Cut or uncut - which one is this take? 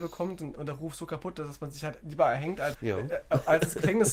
cut